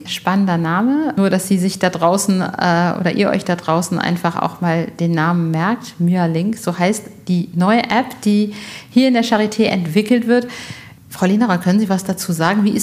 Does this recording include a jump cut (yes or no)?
no